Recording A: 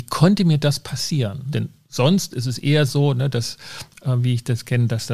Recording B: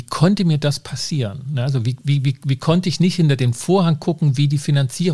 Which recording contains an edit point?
A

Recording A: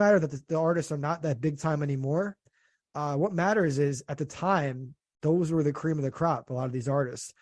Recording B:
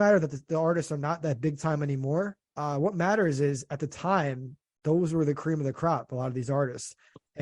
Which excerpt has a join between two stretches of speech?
B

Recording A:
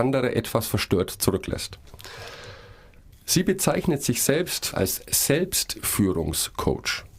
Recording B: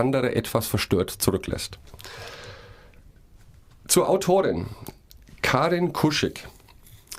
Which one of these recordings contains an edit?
A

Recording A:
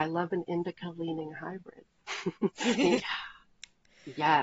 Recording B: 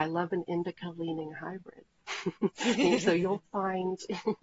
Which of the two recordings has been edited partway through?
A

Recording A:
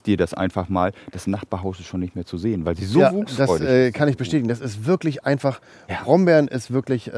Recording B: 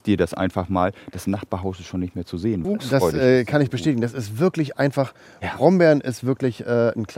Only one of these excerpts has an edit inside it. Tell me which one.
B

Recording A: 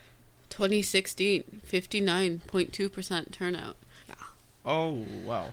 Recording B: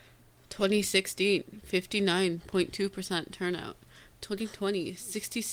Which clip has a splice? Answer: A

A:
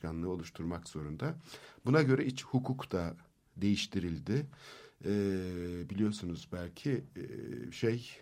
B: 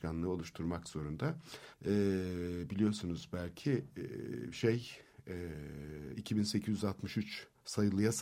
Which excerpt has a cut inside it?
B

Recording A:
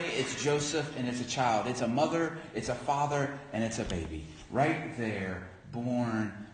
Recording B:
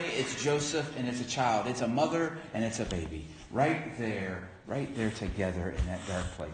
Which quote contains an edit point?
B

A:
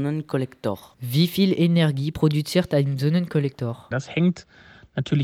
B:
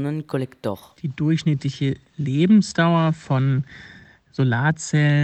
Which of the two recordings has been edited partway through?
A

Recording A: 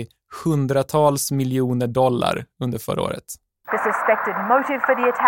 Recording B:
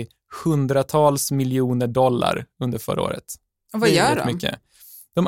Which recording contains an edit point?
A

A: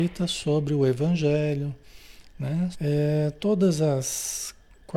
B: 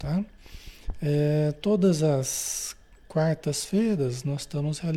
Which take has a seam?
A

